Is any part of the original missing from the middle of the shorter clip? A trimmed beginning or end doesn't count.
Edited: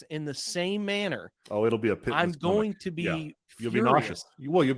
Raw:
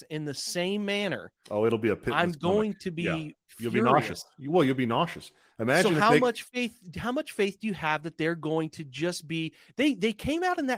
no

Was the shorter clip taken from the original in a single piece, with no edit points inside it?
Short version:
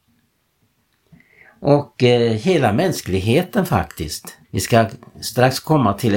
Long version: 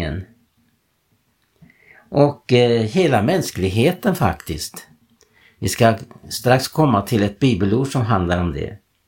no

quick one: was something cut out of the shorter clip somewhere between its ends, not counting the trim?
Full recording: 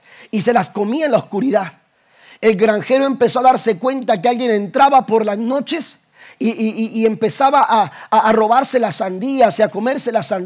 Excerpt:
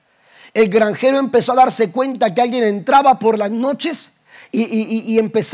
no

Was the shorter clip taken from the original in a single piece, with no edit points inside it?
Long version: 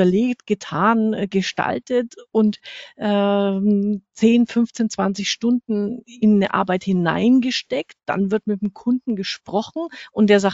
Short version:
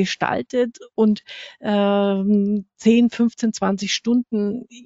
yes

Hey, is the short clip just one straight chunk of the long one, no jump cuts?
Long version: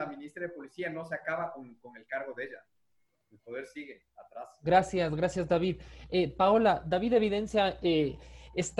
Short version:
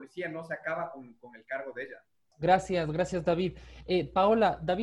no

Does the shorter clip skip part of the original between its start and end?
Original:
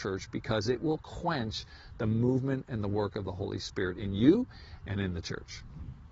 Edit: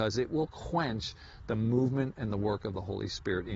no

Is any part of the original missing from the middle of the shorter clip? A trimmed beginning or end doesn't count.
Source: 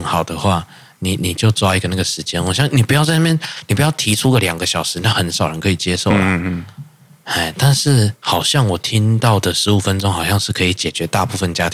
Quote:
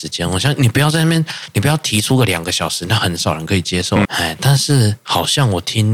yes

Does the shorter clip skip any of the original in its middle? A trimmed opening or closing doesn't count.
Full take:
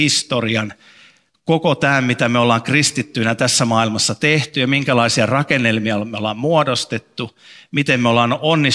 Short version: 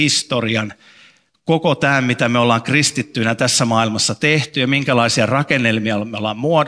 no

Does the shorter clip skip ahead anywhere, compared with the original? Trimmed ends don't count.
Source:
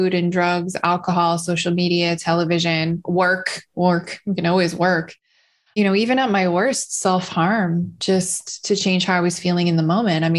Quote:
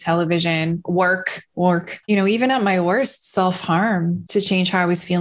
yes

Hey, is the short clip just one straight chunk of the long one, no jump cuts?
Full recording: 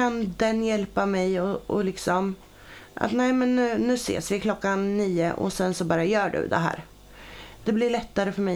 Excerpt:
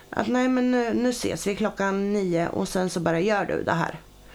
yes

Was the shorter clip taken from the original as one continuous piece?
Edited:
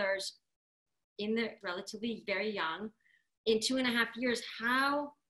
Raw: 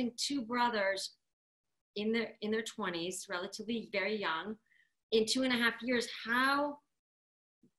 no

